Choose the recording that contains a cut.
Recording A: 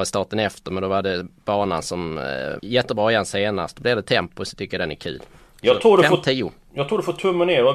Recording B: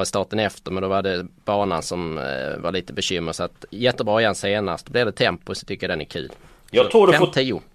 A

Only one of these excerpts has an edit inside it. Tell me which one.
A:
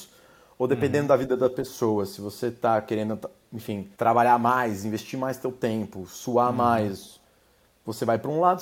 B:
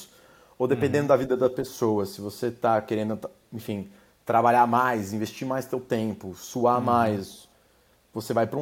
A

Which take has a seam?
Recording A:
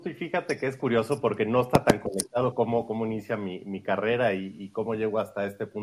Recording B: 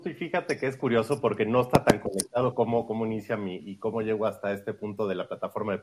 B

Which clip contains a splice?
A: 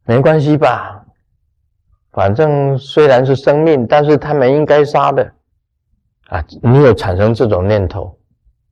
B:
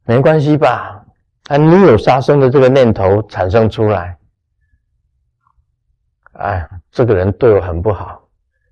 B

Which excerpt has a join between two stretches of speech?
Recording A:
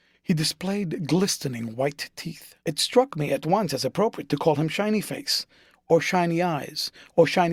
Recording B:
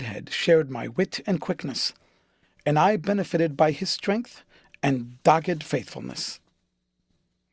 A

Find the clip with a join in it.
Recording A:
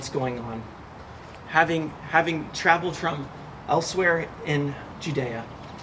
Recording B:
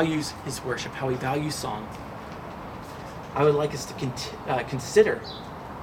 A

